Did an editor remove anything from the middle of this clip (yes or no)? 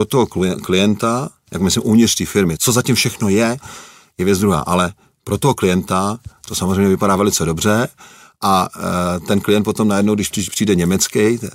yes